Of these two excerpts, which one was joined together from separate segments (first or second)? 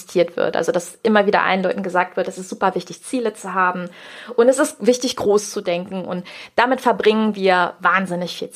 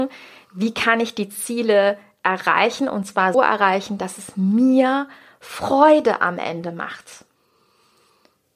second